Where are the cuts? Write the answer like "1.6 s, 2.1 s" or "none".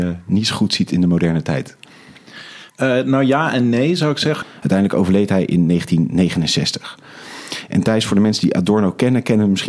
2.7 s, 4.4 s